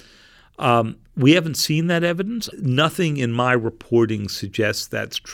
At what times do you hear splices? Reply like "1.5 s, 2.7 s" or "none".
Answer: 2.5 s